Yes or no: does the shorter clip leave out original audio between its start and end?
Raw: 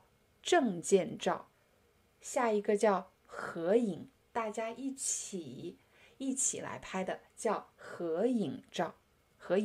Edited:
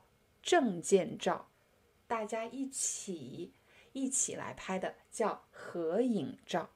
yes